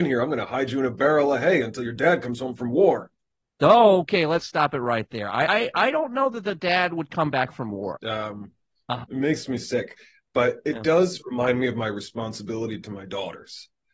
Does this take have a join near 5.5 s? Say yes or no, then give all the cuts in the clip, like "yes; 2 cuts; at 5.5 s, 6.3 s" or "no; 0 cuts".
yes; 3 cuts; at 5.5 s, 8.0 s, 9.0 s